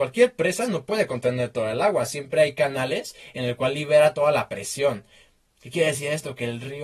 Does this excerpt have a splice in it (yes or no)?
no